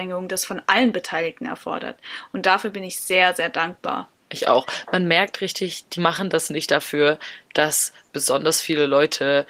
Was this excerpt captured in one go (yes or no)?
yes